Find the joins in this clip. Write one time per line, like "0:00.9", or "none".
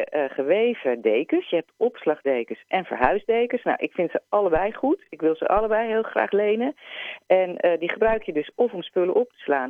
none